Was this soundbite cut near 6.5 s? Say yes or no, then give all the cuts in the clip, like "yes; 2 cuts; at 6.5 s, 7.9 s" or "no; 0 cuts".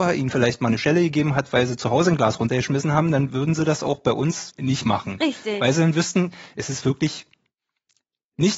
no; 1 cut; at 4.5 s